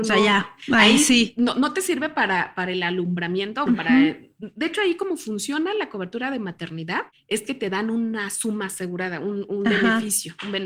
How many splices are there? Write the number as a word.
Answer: one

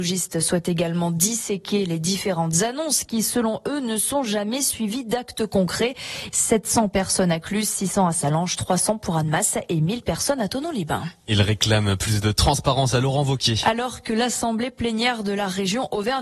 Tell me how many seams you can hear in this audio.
one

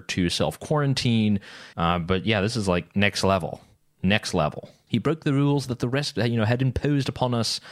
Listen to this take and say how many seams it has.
two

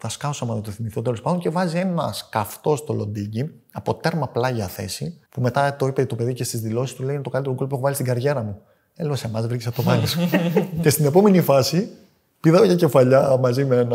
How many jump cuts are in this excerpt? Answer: one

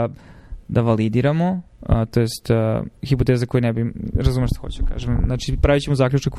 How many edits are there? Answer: one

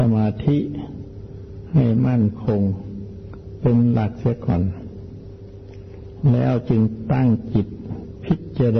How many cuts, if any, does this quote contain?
zero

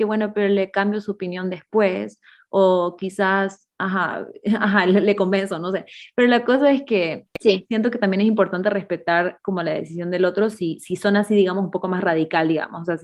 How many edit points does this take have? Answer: zero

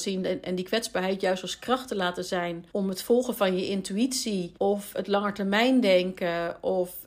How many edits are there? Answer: two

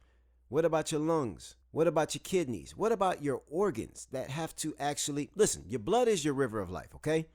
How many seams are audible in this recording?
one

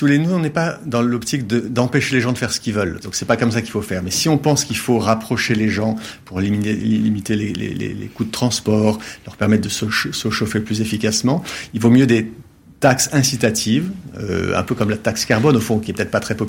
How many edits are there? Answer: one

